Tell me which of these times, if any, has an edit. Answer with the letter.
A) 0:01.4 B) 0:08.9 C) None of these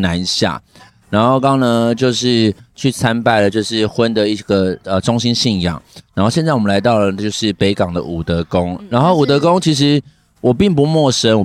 A